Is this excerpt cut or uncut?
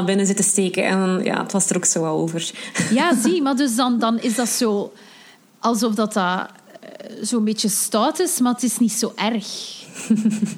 uncut